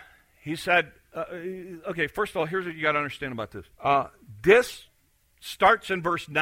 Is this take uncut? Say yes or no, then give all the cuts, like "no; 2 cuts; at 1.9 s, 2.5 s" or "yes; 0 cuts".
no; 1 cut; at 3.7 s